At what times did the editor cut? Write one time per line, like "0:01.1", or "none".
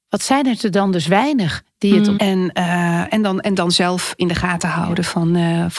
0:02.2